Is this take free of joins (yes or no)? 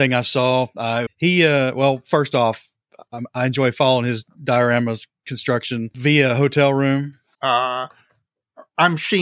no